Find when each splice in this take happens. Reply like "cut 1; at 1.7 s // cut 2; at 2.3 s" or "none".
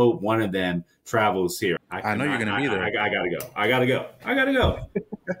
cut 1; at 1.8 s

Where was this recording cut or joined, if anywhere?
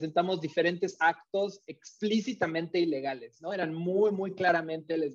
none

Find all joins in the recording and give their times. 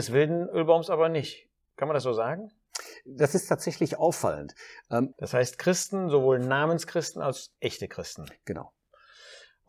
cut 1; at 5.1 s

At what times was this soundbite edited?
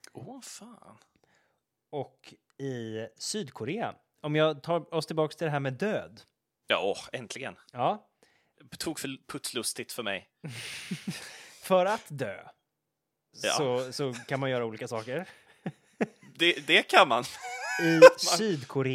none

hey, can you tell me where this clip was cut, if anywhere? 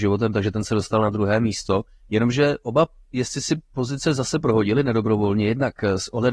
none

